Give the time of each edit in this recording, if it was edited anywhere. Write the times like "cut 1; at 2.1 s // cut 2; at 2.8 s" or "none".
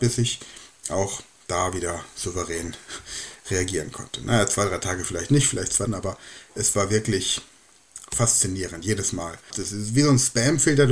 cut 1; at 5.9 s // cut 2; at 9.5 s